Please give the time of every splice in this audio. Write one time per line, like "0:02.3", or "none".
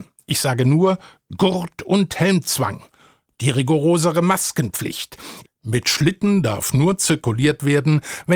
0:05.4